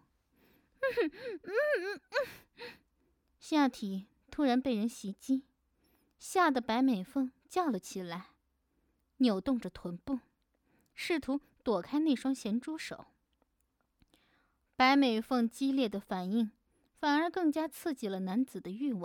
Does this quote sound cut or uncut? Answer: uncut